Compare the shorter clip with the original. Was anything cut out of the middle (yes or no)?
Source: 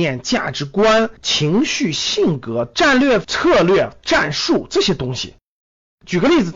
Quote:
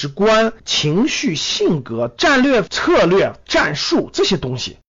no